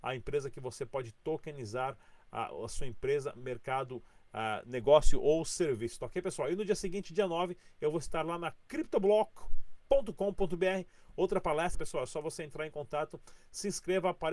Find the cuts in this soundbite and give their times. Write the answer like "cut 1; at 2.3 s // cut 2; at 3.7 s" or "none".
cut 1; at 11.7 s